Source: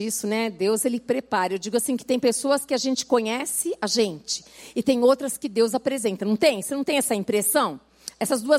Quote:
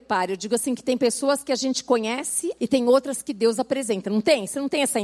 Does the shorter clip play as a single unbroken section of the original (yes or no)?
no